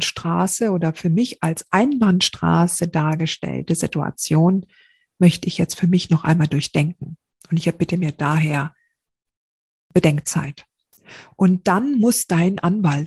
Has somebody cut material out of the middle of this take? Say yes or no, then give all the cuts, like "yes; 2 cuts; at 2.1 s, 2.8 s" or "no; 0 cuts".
no; 0 cuts